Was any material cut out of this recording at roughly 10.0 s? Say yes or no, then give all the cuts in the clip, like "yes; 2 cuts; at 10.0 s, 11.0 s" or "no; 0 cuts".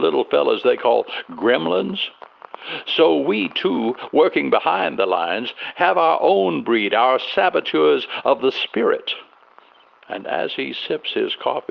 yes; 1 cut; at 10.0 s